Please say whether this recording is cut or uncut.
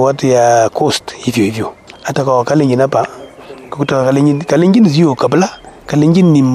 uncut